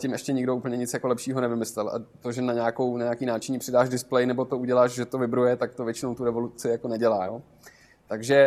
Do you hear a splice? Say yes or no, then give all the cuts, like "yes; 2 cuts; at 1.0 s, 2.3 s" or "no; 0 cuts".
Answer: no; 0 cuts